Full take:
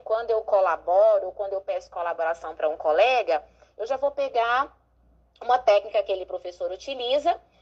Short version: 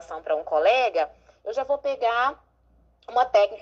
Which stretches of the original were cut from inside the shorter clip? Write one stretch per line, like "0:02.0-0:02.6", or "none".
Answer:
none